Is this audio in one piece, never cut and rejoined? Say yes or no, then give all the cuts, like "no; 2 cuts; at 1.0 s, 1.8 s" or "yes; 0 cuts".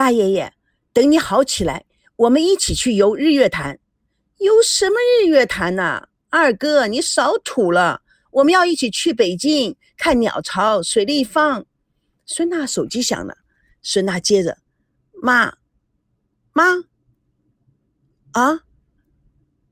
yes; 0 cuts